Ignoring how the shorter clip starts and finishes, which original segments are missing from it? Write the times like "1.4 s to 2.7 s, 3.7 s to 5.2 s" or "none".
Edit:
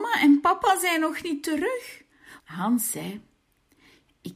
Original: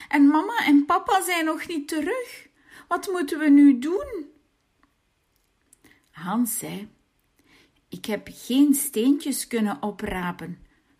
2.8 s to 6.1 s